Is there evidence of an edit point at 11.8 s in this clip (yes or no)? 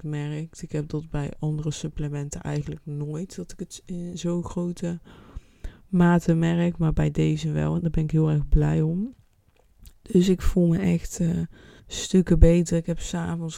yes